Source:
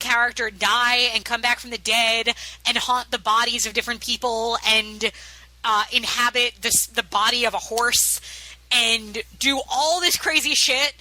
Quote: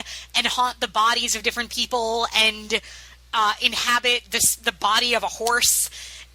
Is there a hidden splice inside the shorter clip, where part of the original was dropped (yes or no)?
no